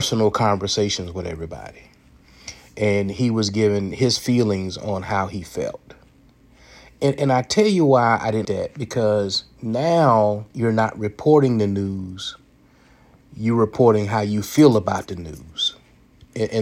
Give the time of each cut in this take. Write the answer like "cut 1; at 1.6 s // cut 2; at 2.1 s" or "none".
cut 1; at 8.4 s // cut 2; at 10.5 s